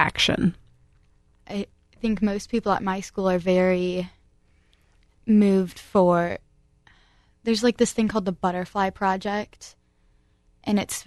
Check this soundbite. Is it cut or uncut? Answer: cut